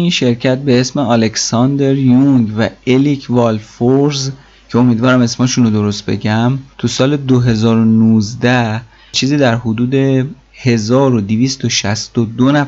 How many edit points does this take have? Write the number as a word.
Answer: one